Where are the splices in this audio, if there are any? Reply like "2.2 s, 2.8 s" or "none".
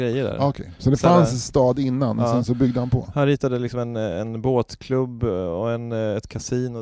none